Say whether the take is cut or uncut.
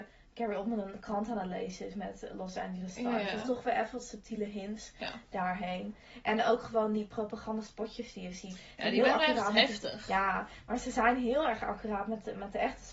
uncut